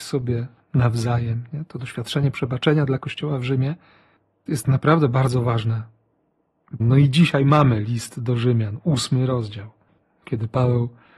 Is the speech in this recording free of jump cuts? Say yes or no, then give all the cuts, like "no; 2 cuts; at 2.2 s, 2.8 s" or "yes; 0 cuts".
no; 2 cuts; at 4.5 s, 6.8 s